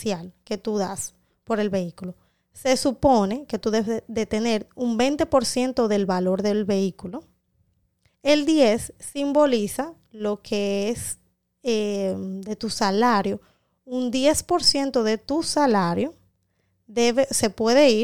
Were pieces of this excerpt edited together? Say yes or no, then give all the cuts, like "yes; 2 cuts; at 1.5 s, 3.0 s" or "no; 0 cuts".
yes; 1 cut; at 8.1 s